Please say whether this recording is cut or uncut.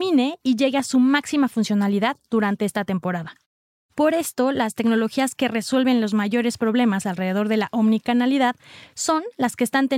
cut